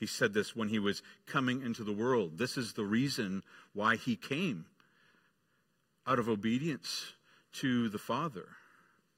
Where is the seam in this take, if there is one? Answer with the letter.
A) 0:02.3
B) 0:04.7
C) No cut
C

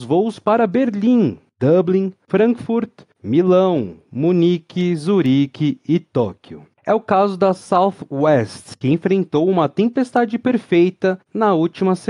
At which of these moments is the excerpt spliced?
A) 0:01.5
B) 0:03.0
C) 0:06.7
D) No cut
C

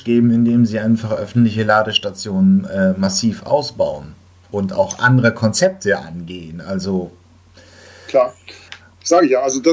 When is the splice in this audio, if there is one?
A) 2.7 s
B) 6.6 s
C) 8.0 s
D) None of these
D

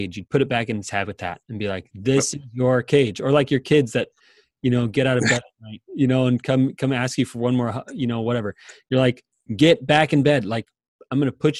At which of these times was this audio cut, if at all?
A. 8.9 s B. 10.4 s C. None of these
C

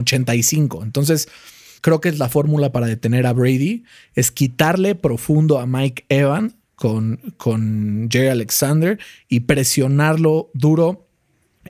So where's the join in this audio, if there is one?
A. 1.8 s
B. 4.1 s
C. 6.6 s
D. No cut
A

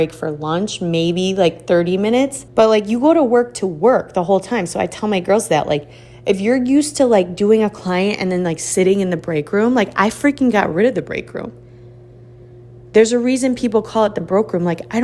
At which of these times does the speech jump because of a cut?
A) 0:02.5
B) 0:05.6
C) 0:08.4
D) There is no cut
A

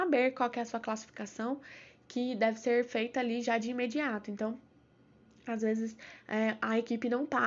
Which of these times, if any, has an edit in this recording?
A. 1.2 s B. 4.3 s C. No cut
C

